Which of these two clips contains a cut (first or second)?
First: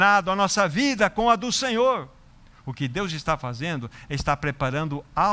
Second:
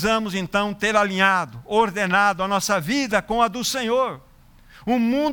first